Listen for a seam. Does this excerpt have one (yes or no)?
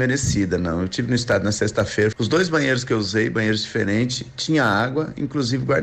yes